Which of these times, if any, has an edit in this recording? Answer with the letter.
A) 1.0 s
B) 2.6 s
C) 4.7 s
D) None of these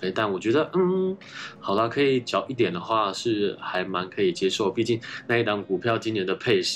B